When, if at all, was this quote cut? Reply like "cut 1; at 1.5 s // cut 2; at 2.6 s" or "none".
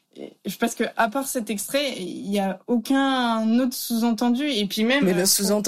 none

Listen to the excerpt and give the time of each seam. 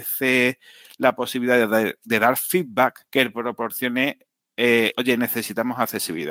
cut 1; at 3.1 s // cut 2; at 4.9 s

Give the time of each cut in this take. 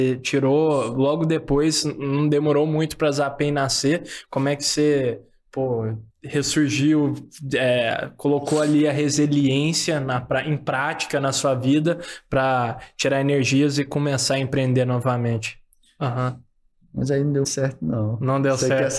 cut 1; at 6.1 s // cut 2; at 16.0 s // cut 3; at 17.4 s

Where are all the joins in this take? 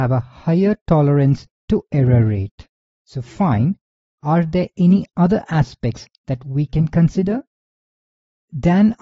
cut 1; at 2.9 s

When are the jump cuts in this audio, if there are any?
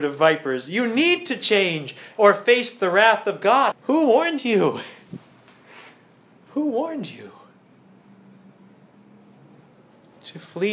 cut 1; at 2.2 s // cut 2; at 3.7 s

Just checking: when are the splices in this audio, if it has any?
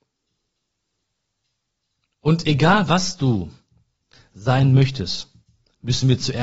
none

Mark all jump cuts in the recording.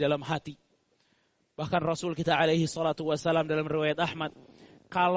none

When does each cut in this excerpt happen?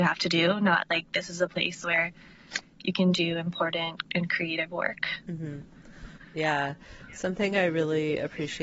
none

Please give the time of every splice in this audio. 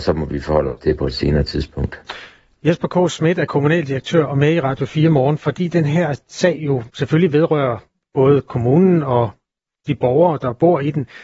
none

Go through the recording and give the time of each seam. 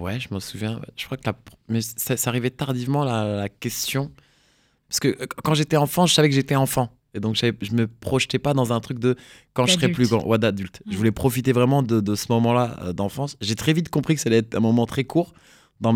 cut 1; at 7.1 s

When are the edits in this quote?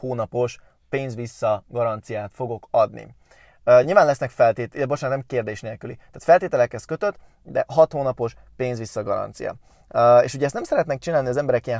none

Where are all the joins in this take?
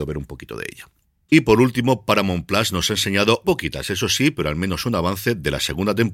cut 1; at 1.3 s // cut 2; at 3.4 s

